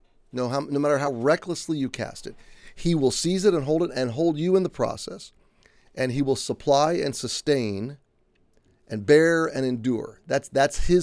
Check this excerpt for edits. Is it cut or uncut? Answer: uncut